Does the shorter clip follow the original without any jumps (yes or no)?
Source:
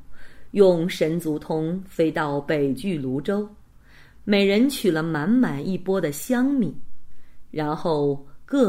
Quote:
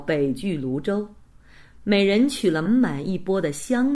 no